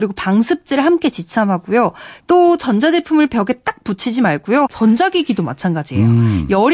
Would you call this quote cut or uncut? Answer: cut